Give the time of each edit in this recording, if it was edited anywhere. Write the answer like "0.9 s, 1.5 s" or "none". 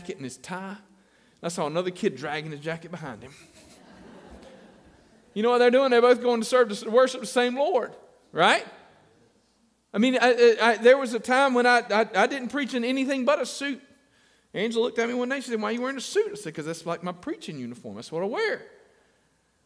none